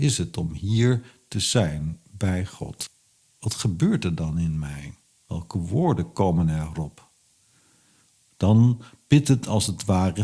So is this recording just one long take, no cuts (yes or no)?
yes